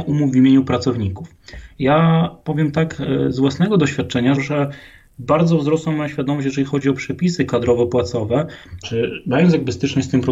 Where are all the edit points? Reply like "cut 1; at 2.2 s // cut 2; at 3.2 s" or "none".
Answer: cut 1; at 1.8 s // cut 2; at 4.4 s // cut 3; at 8.8 s